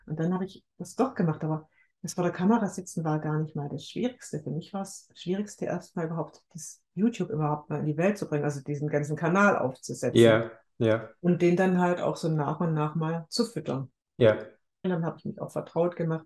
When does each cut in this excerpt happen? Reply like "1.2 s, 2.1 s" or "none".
14.8 s